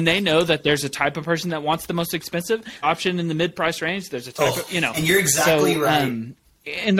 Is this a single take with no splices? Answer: no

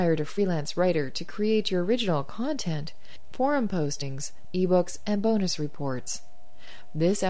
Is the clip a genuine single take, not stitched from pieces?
no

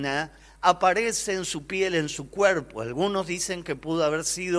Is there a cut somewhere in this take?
no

